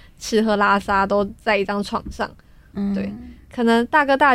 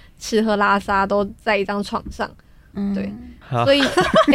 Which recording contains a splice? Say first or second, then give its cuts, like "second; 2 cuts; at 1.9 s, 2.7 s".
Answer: second; 1 cut; at 3.4 s